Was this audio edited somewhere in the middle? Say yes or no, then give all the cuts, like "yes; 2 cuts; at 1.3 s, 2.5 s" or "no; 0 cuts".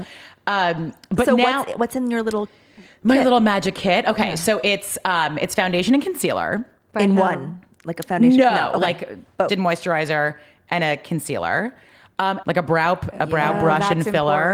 yes; 2 cuts; at 9.5 s, 12.4 s